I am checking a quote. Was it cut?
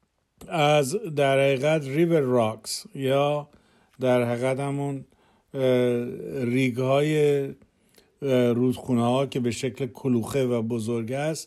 no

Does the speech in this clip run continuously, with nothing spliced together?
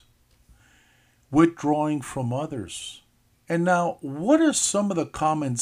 no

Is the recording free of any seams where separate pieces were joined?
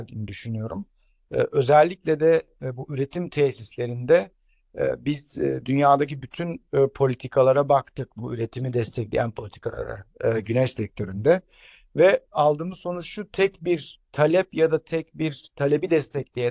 yes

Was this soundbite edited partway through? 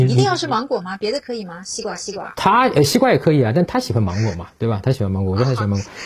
no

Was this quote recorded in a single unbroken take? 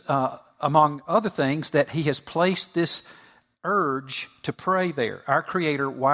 yes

